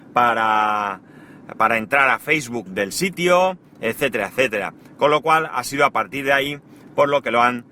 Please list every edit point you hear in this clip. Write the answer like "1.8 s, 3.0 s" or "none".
2.7 s